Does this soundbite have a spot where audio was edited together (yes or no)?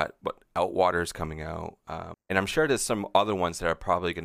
yes